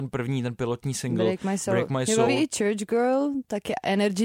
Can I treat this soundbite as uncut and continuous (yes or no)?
yes